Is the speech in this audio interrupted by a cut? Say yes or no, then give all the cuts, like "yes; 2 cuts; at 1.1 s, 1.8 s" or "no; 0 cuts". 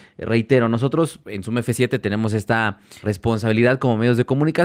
yes; 1 cut; at 3.0 s